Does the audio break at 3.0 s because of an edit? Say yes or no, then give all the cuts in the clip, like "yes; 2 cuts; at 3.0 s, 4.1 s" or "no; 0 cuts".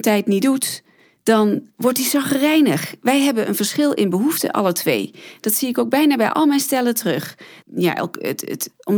no; 1 cut; at 7.6 s